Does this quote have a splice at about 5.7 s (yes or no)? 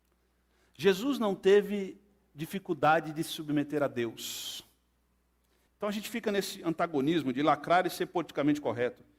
yes